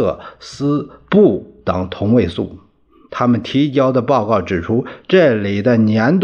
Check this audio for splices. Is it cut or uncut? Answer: uncut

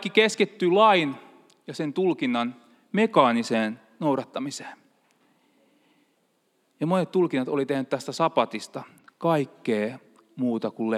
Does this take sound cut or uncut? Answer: uncut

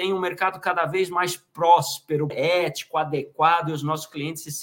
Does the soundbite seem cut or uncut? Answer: cut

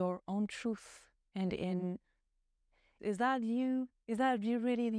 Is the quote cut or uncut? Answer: cut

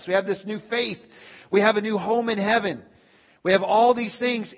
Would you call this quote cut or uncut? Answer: uncut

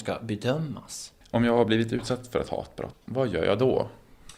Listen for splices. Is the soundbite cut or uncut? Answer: cut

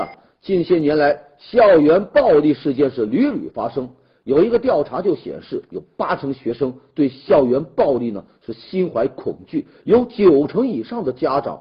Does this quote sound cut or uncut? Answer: uncut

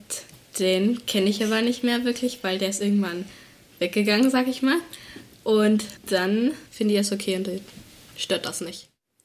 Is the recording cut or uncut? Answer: uncut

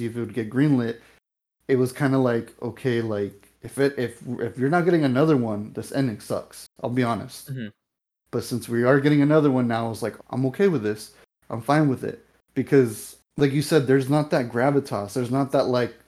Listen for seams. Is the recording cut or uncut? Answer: cut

